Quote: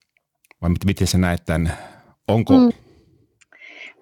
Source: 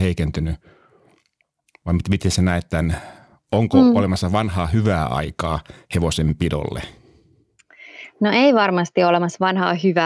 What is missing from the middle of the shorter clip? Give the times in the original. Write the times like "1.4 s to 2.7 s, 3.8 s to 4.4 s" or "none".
3.9 s to 6.9 s